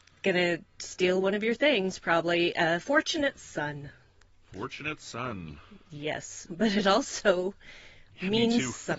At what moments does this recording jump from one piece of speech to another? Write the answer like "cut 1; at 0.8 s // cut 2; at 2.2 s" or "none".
cut 1; at 6.5 s